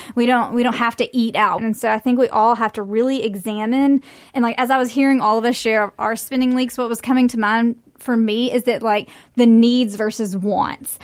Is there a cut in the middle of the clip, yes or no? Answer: yes